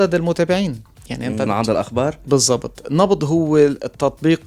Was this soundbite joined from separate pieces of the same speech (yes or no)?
yes